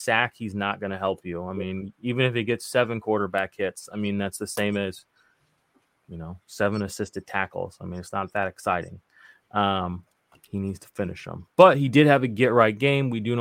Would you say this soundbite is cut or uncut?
uncut